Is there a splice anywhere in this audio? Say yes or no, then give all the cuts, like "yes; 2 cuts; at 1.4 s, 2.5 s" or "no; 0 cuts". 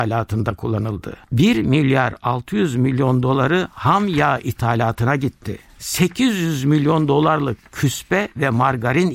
yes; 1 cut; at 1.2 s